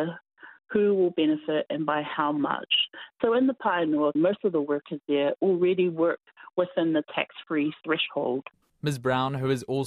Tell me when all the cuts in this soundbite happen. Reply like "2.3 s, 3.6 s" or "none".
4.2 s, 8.6 s